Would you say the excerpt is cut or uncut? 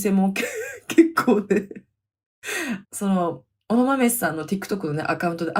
uncut